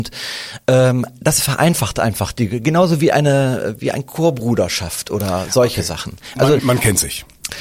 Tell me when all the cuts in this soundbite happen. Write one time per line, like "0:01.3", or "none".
0:06.6